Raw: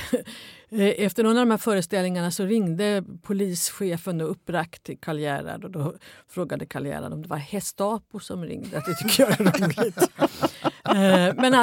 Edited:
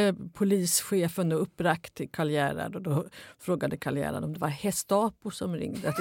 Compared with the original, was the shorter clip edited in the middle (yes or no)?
no